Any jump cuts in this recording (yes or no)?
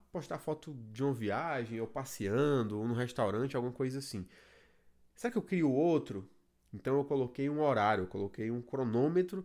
yes